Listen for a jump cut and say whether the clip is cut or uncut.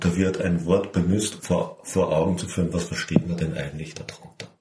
cut